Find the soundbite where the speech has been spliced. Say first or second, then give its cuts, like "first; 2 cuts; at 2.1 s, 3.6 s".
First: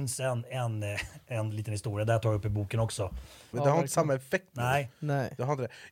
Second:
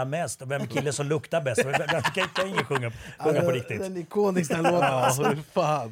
first; 1 cut; at 3.5 s